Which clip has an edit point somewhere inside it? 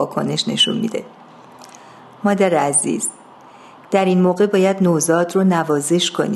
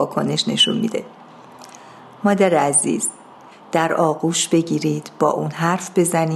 second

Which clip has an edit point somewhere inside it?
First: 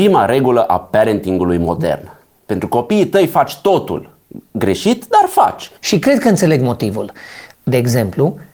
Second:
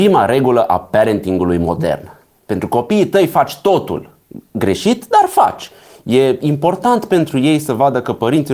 first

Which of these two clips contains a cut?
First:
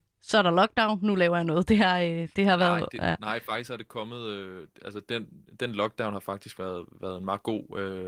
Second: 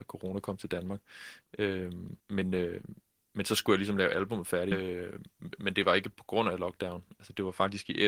second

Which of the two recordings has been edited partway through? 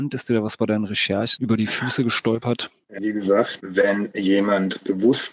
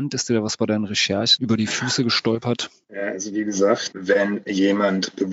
first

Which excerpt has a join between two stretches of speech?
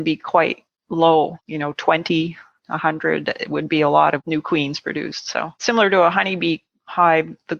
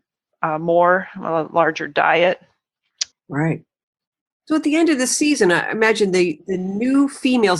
second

